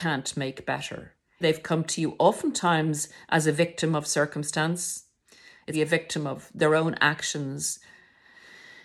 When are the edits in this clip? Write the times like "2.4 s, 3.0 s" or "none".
1.4 s, 5.7 s